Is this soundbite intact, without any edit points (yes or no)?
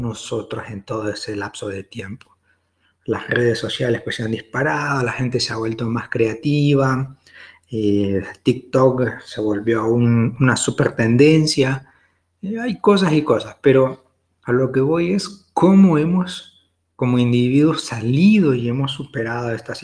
yes